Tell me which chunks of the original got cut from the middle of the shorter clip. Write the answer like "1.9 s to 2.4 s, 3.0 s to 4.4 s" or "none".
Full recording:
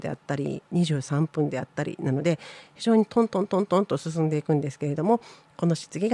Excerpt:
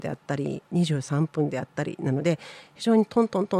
none